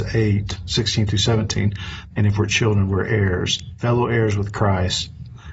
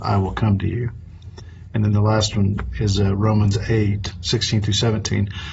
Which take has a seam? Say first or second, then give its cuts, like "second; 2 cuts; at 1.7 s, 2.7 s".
first; 2 cuts; at 2.1 s, 3.8 s